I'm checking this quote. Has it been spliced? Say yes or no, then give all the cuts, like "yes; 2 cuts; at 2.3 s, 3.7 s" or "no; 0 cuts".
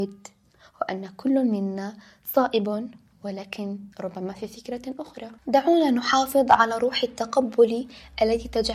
yes; 2 cuts; at 3.9 s, 5.4 s